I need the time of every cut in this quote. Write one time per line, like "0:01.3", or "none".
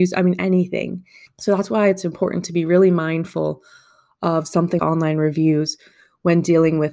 0:01.3
0:04.8